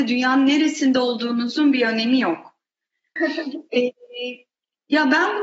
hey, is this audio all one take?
no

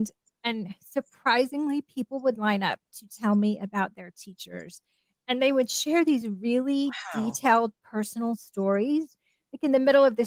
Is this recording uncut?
yes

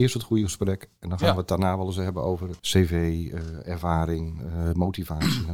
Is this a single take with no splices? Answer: no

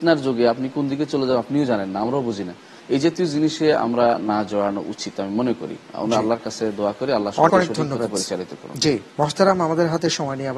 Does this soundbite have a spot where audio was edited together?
yes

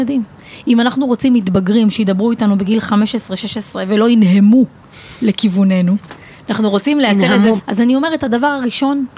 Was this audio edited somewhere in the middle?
yes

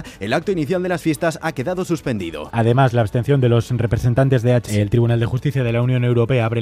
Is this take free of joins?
no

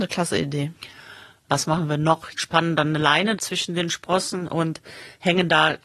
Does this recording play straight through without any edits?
no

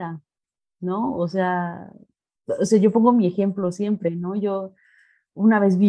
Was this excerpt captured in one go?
yes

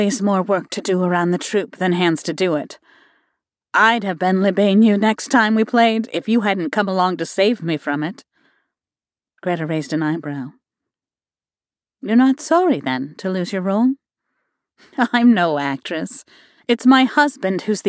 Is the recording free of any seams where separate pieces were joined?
yes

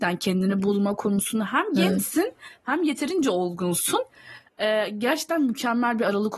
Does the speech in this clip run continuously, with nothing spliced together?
yes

